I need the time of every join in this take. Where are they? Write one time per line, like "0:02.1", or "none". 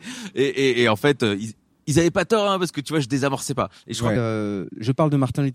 0:04.2